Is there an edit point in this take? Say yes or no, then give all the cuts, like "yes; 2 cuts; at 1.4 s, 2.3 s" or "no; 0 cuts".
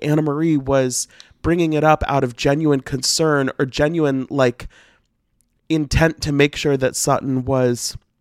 no; 0 cuts